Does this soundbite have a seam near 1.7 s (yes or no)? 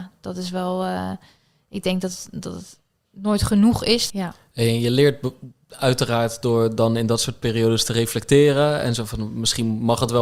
no